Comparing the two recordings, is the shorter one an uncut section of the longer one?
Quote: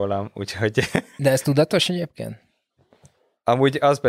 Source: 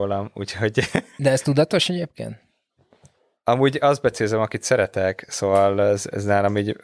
yes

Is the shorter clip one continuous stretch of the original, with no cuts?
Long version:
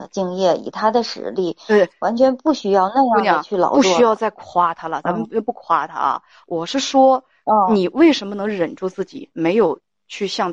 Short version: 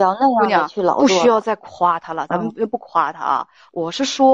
yes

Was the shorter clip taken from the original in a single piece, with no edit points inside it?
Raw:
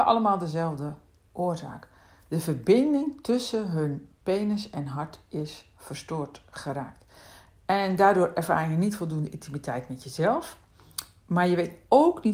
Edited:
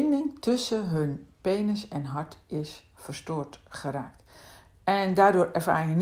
yes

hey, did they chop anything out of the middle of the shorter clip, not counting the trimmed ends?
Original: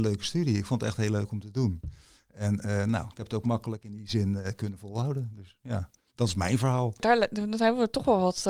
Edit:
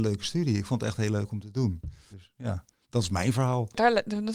yes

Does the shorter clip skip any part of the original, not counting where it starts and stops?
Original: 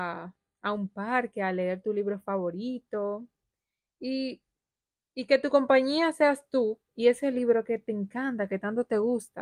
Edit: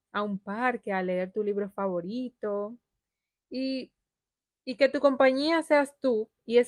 no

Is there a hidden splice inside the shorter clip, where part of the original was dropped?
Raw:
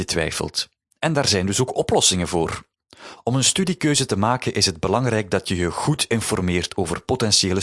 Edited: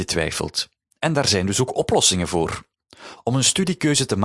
no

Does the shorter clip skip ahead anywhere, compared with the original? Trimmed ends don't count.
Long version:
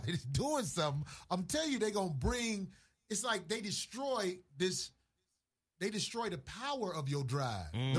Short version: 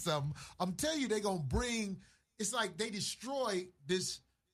no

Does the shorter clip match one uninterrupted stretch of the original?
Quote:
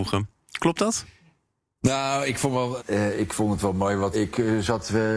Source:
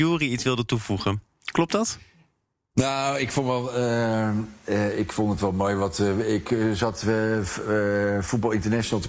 no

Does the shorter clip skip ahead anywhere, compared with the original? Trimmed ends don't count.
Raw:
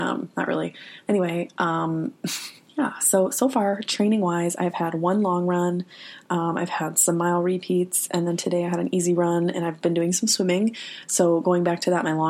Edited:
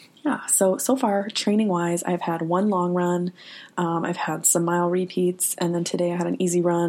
no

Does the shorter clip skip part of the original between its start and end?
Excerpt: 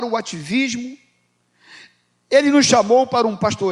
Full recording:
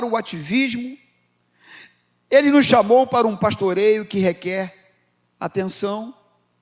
no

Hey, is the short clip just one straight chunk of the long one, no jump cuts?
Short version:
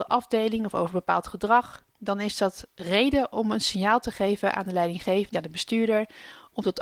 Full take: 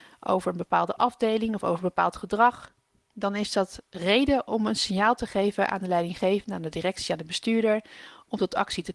no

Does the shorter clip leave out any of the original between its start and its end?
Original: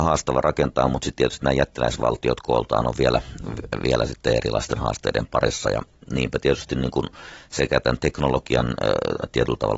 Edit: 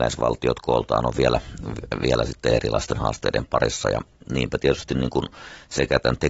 no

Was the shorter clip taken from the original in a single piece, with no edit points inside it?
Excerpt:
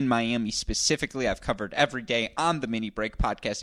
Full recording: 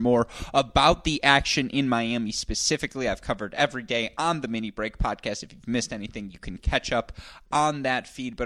yes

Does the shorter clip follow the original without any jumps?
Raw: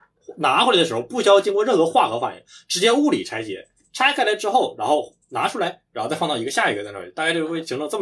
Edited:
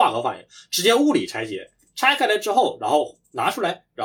yes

